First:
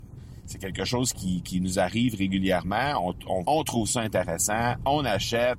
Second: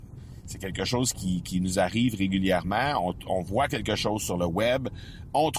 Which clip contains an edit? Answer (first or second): first